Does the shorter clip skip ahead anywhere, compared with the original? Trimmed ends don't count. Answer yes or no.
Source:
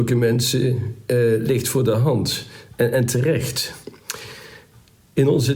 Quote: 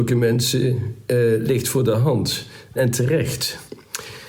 yes